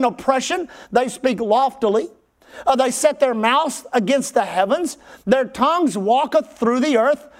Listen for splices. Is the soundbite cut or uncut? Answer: uncut